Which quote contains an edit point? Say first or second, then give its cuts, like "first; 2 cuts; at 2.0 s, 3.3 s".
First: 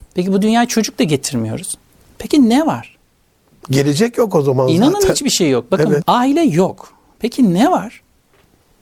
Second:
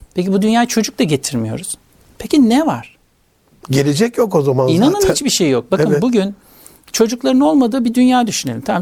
first; 1 cut; at 6.0 s